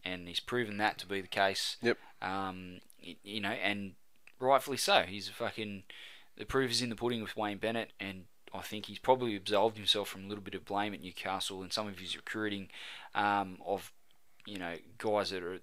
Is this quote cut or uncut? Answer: cut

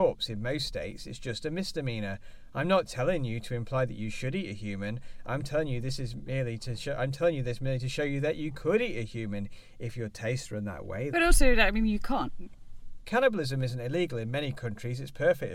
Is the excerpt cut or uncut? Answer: cut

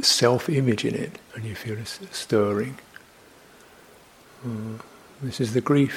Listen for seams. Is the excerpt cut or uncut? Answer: cut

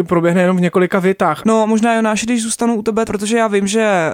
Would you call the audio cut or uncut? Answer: cut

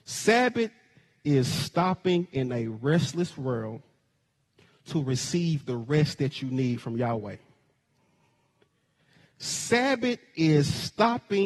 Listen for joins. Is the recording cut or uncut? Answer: uncut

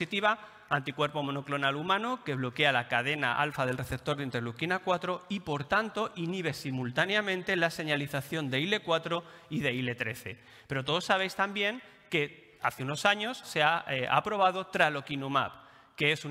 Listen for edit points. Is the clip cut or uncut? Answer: cut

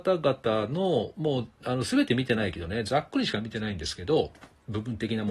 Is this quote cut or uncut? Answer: uncut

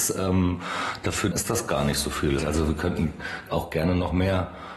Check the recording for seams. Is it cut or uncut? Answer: cut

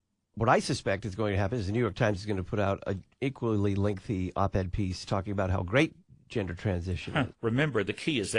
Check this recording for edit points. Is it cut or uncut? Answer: cut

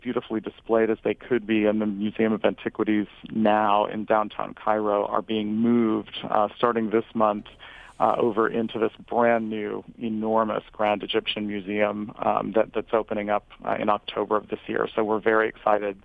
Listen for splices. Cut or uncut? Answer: uncut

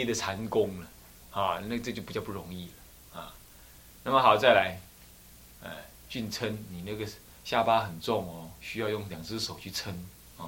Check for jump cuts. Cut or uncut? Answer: uncut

